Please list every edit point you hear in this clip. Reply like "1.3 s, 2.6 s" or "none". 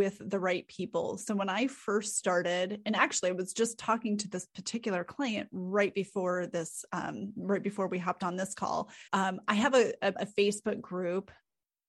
9.1 s, 10.1 s

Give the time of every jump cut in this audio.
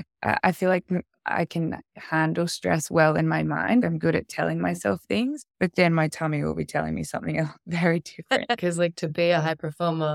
5.5 s, 8.6 s

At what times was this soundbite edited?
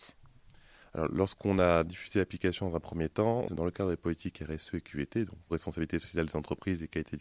3.5 s

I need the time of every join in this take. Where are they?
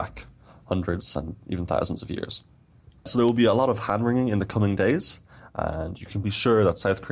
none

